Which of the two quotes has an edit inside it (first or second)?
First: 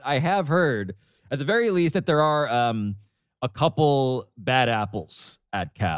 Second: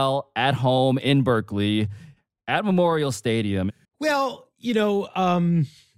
second